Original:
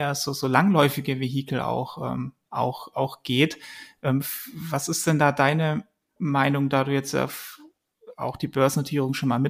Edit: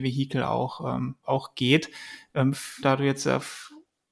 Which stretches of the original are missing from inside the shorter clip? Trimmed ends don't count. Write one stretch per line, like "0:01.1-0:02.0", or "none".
0:02.4-0:02.9
0:04.5-0:06.7

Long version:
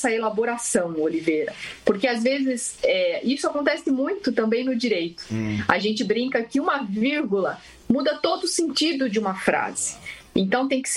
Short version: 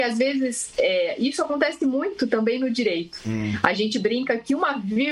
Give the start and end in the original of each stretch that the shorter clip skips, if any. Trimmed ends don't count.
none

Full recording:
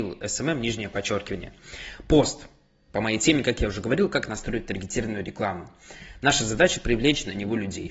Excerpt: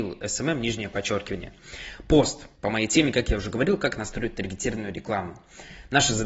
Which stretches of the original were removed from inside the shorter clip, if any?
0:02.6-0:02.9

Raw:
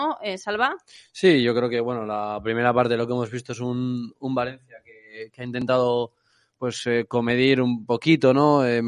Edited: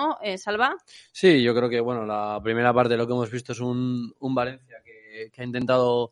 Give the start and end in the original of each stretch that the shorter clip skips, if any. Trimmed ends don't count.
none

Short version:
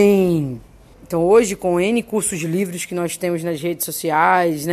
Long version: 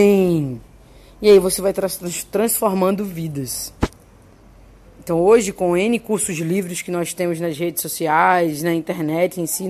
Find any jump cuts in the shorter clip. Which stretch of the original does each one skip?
0:00.9-0:04.9

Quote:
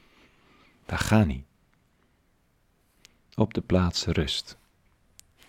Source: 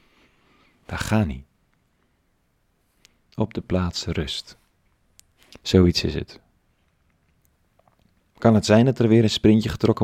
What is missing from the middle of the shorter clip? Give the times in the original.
none

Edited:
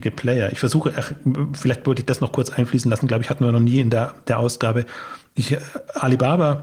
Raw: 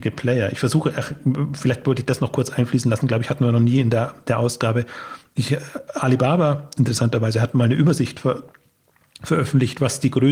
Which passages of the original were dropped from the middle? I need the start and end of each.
none

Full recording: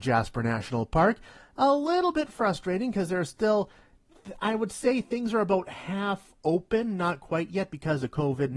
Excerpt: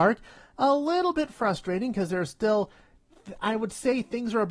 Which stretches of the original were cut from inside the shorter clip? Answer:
none

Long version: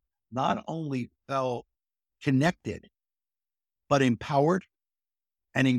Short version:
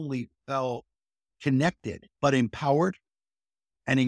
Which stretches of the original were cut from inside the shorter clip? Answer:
0:02.9-0:03.8

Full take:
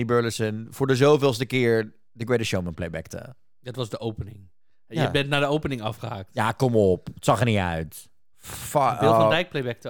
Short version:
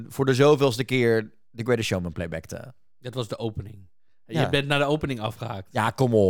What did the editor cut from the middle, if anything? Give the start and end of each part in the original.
none

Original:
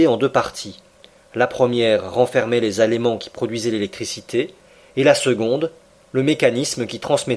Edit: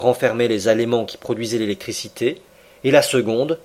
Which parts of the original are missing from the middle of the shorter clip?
none

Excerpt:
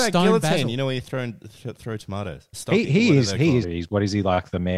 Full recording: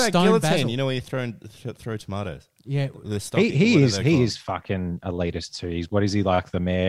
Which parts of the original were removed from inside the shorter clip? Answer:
0:02.5-0:03.2
0:04.3-0:05.6

